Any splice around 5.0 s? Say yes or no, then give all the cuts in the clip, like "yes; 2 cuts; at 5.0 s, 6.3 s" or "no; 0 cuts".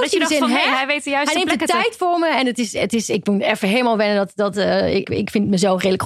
yes; 1 cut; at 5.0 s